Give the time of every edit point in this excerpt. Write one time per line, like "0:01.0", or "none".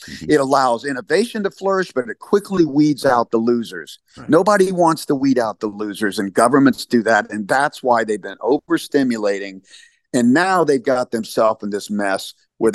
none